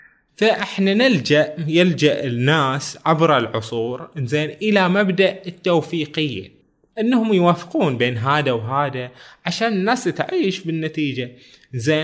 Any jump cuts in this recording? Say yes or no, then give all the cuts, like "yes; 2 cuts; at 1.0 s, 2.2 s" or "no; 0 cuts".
no; 0 cuts